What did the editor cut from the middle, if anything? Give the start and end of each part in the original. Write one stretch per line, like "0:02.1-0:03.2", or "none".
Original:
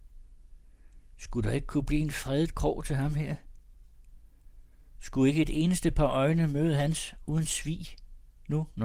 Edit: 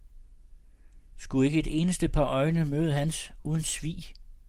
0:01.1-0:04.9